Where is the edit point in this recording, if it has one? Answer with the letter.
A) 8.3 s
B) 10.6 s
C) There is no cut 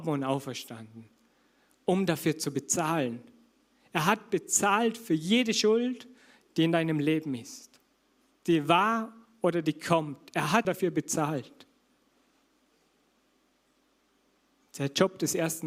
B